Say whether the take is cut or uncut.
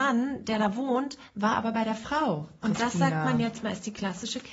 cut